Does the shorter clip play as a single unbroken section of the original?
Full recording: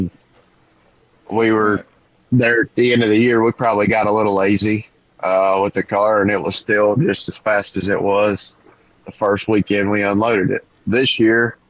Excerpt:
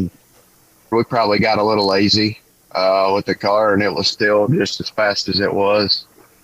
no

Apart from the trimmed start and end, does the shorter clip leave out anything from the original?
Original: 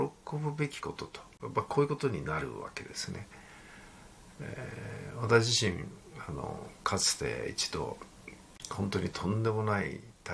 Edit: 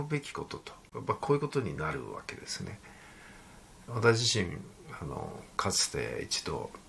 yes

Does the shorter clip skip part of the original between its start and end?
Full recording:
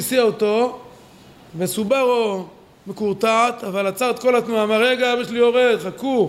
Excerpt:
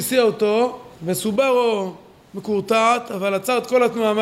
yes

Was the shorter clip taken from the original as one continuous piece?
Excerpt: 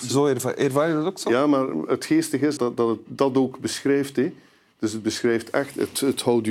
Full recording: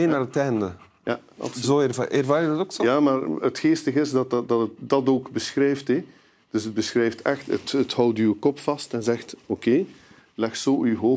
no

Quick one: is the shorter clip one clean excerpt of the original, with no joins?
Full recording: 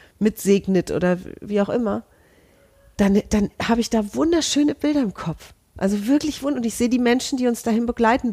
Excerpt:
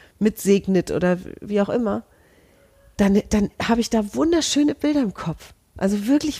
yes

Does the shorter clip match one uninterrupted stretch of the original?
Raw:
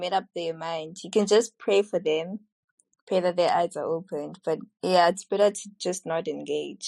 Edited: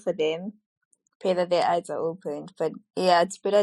yes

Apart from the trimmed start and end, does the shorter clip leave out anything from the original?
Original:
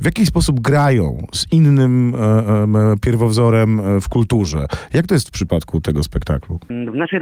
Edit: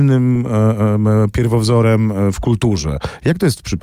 no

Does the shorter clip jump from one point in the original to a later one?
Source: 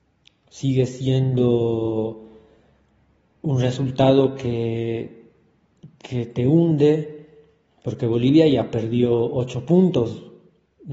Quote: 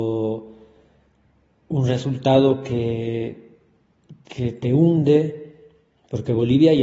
no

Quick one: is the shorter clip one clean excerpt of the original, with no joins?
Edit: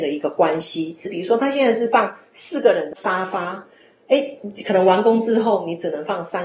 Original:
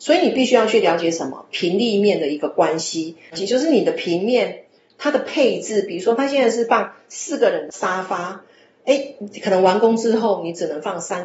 no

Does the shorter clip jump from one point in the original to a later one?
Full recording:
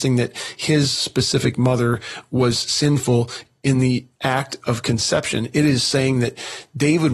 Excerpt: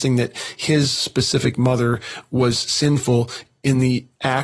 no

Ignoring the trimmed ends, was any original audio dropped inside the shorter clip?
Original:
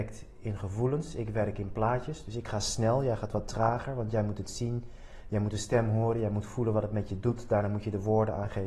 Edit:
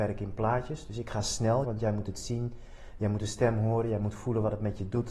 yes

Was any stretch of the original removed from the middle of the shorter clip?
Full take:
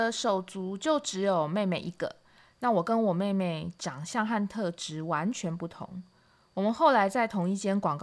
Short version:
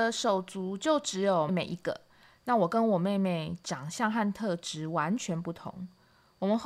yes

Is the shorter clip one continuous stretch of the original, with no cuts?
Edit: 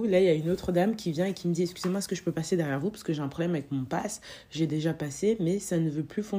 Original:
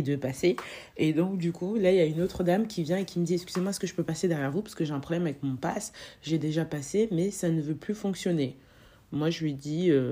yes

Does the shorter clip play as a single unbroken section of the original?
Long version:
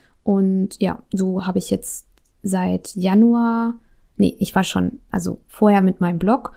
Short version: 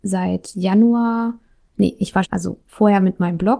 no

